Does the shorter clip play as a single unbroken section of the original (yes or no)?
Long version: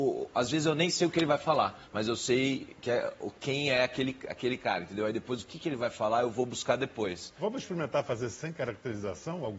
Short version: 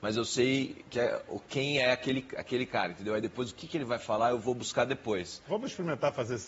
yes